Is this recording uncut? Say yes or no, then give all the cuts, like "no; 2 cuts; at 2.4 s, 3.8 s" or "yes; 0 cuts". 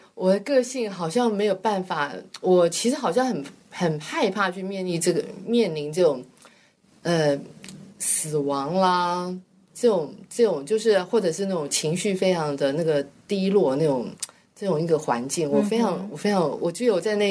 yes; 0 cuts